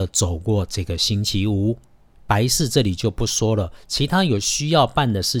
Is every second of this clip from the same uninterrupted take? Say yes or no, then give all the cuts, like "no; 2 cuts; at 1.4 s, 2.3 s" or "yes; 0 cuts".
no; 1 cut; at 2.2 s